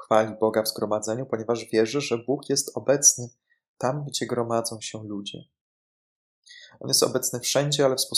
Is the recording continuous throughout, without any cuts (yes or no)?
yes